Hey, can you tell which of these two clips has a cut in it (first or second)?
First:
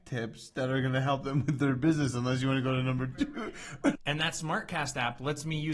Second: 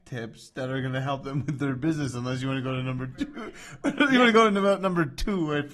first